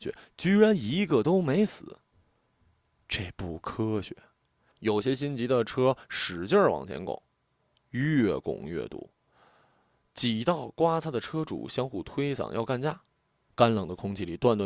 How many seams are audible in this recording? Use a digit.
1